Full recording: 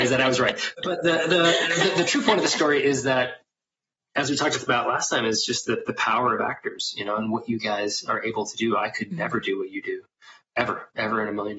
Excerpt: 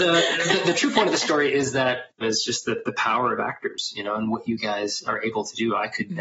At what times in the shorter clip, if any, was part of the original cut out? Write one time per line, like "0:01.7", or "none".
0:02.2